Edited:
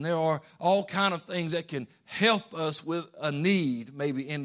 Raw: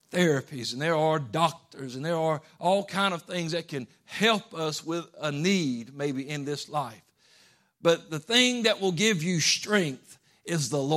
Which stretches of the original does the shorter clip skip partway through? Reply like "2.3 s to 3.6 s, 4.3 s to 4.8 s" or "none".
none